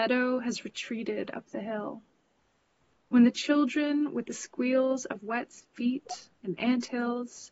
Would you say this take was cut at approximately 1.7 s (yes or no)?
no